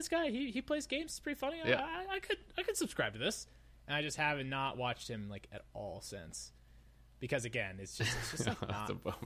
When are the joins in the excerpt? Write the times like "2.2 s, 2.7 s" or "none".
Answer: none